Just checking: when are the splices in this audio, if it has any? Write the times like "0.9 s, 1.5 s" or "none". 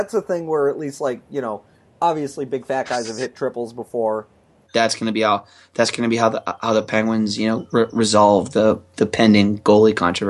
4.7 s